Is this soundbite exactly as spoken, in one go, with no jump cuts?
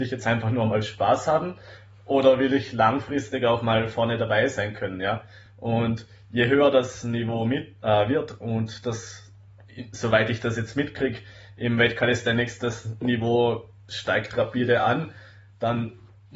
yes; 0 cuts

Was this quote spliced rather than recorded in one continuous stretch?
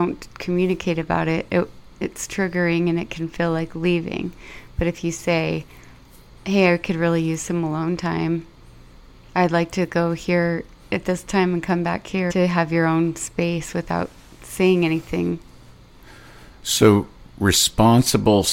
yes; 2 cuts; at 2.0 s, 12.3 s

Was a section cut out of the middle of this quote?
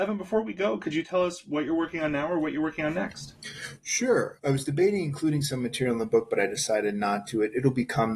yes; 1 cut; at 4.4 s

